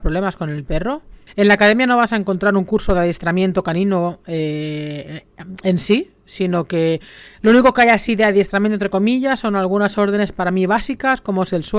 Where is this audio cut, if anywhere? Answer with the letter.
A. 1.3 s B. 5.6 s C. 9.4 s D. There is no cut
A